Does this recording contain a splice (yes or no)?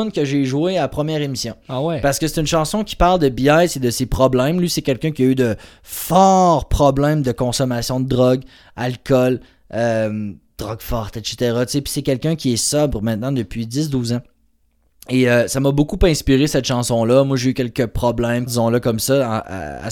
yes